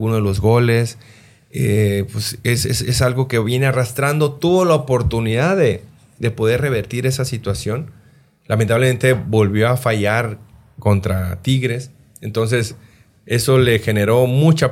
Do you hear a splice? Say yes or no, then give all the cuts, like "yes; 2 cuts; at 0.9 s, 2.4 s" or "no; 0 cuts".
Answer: no; 0 cuts